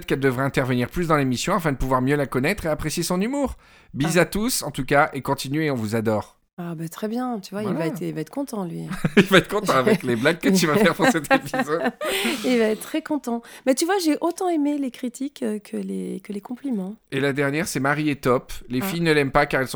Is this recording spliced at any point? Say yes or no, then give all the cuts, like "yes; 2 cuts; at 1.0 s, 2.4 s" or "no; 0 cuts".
no; 0 cuts